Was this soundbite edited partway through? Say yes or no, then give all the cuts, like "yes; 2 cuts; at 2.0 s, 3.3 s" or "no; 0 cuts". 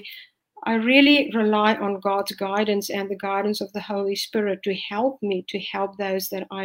no; 0 cuts